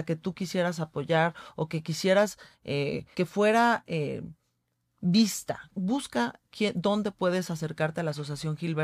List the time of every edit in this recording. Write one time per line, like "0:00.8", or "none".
0:03.1
0:05.7